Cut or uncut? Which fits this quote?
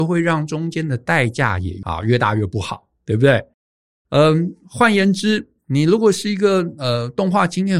uncut